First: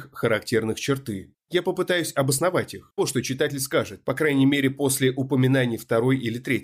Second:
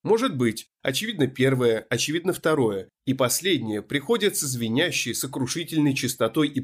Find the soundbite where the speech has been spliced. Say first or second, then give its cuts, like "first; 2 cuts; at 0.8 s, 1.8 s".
first; 1 cut; at 3.0 s